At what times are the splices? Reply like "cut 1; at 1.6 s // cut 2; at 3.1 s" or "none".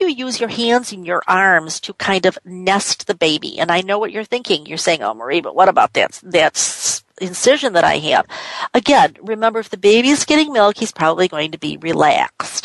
none